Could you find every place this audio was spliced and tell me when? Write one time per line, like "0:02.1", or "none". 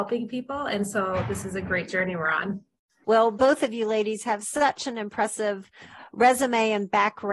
0:03.0